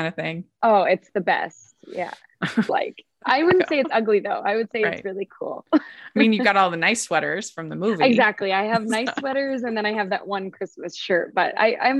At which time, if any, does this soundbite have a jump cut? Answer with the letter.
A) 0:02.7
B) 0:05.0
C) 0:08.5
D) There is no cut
A